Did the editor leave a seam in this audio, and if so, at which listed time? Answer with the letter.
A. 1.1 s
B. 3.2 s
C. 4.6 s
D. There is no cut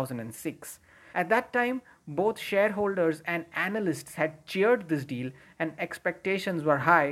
A